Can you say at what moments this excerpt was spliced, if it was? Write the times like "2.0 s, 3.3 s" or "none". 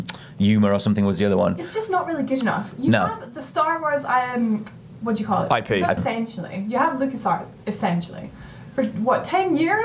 6.0 s